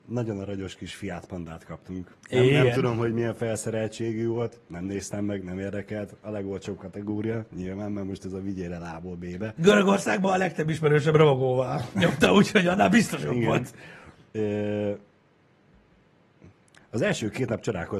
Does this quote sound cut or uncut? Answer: uncut